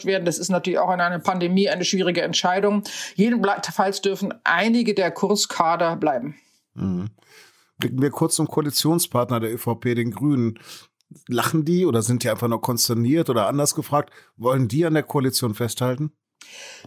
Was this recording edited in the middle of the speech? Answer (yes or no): no